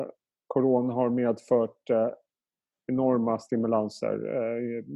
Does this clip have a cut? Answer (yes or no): no